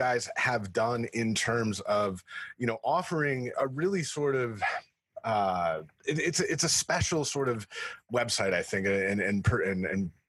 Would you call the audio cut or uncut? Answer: cut